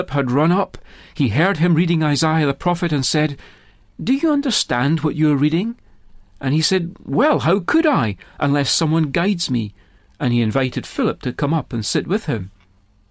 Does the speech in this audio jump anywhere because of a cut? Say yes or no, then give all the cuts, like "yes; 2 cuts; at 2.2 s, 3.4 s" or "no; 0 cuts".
no; 0 cuts